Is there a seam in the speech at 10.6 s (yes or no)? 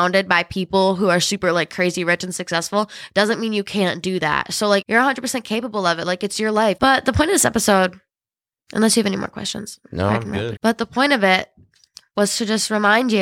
yes